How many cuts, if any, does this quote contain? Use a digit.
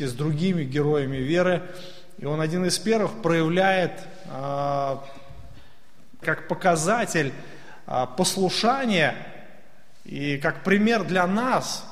1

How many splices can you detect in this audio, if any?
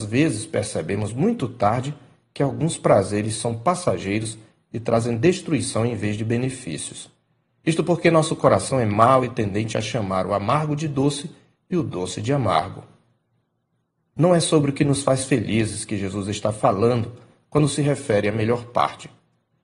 0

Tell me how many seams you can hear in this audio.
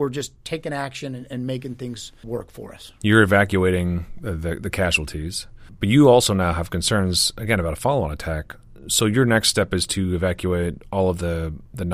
1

